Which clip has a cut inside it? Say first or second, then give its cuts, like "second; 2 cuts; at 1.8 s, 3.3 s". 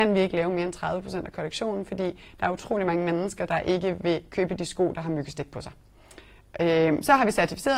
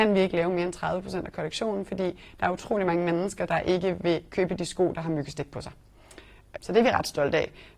second; 1 cut; at 6.6 s